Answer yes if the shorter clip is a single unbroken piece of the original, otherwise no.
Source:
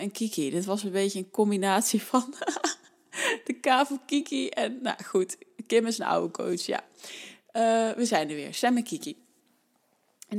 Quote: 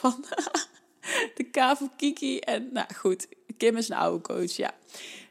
yes